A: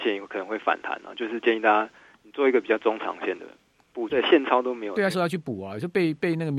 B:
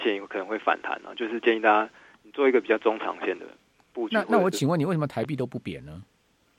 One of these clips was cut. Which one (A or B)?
A